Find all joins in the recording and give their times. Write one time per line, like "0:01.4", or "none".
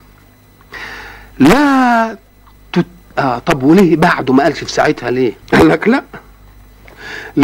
0:03.1
0:05.4